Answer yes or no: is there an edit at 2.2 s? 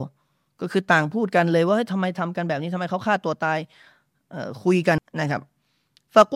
no